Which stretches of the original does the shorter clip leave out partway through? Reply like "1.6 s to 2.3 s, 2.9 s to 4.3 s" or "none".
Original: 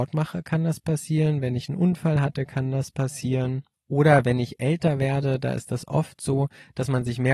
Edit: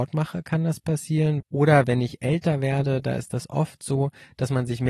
1.4 s to 3.8 s

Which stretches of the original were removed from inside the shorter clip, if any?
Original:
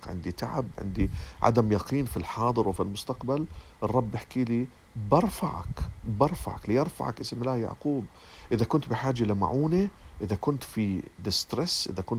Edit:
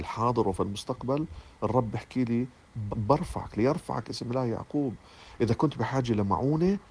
5.1 s to 6.0 s

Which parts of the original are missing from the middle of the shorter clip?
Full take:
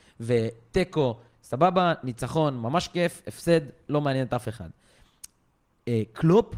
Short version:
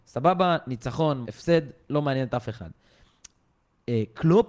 2.6 s to 3.2 s

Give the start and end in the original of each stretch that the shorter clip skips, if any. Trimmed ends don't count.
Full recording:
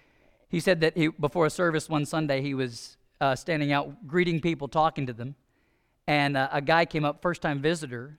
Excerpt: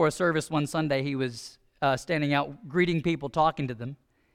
none

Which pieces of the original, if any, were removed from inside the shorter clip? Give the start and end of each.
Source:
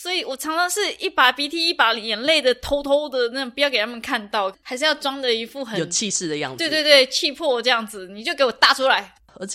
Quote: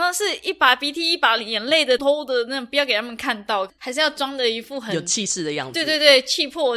2.5 s to 2.8 s

